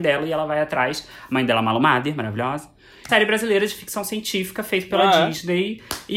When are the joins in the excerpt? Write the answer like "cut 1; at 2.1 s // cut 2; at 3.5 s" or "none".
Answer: cut 1; at 3.1 s